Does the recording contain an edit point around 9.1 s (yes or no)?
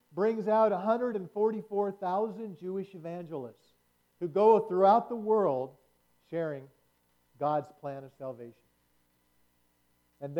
no